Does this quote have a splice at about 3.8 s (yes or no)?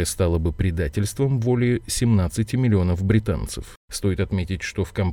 yes